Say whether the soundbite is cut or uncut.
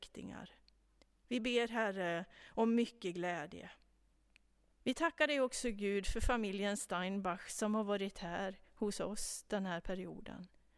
cut